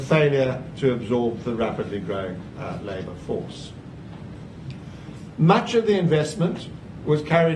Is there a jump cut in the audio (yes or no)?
no